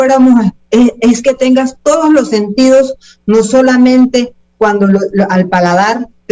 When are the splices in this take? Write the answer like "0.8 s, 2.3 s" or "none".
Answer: none